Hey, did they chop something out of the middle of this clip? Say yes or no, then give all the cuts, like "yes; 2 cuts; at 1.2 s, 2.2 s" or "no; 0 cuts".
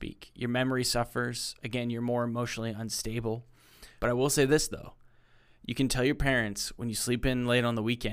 yes; 1 cut; at 4.0 s